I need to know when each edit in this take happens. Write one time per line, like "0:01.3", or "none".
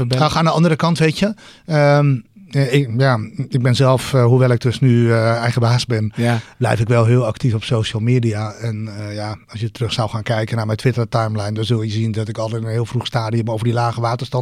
none